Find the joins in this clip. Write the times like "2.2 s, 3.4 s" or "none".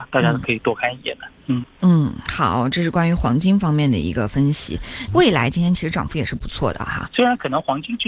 5.1 s, 7.1 s